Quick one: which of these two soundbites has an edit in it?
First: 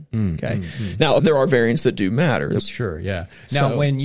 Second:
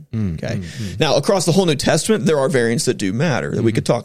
first; 2 cuts; at 1.2 s, 2.6 s

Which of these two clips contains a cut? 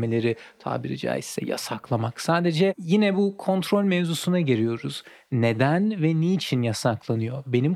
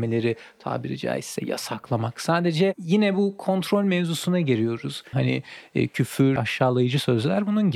second; 2 cuts; at 5.1 s, 6.4 s

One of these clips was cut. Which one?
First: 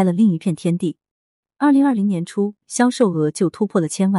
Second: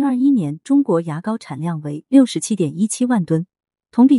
first; 2 cuts; at 1.5 s, 2.6 s

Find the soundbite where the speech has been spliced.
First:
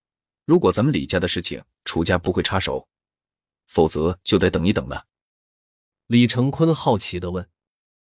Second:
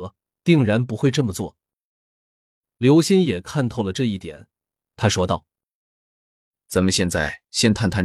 first; 2 cuts; at 3.5 s, 5.9 s

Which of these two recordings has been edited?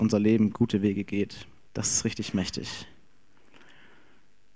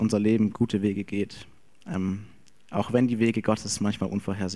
first; 1 cut; at 1.7 s

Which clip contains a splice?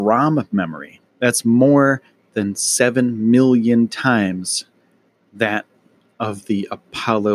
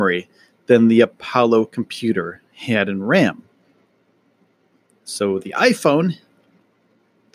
first; 1 cut; at 1.1 s

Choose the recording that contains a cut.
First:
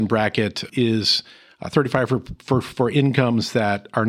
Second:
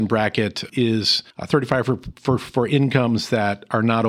second; 1 cut; at 1.3 s

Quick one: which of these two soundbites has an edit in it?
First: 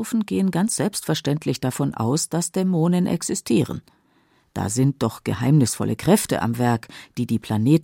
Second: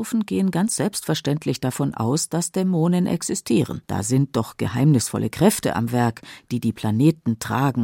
second; 1 cut; at 3.9 s

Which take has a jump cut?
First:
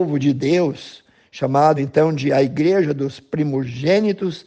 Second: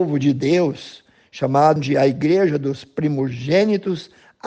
second; 1 cut; at 1.8 s

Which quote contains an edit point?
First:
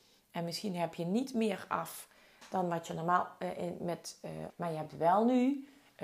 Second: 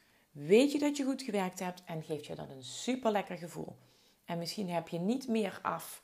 first; 1 cut; at 4.5 s

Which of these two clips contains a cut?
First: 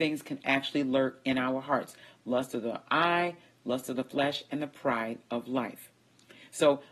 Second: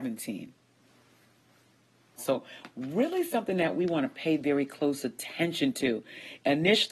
second; 1 cut; at 2.2 s

